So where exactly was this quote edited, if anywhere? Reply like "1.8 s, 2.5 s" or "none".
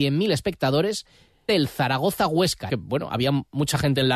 1.5 s, 2.7 s